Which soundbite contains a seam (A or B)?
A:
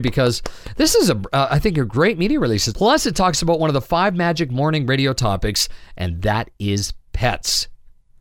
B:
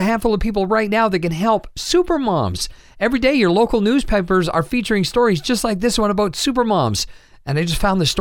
A